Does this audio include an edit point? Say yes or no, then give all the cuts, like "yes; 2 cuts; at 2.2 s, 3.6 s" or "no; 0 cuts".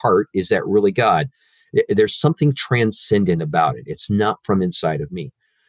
no; 0 cuts